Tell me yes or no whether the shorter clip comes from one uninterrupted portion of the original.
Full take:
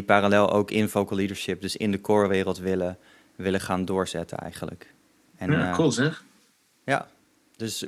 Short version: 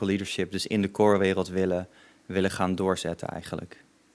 yes